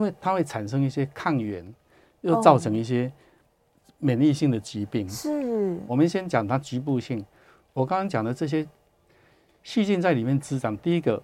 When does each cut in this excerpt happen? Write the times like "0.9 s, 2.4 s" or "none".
5.9 s